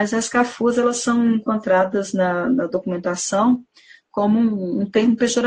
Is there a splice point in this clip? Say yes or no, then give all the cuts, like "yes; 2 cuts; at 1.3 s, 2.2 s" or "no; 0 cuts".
no; 0 cuts